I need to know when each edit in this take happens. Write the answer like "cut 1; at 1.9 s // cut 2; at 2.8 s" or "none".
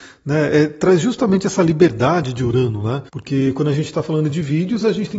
cut 1; at 3.1 s